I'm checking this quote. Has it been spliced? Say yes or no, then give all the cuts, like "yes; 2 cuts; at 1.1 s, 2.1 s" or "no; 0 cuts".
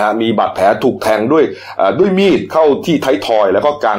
no; 0 cuts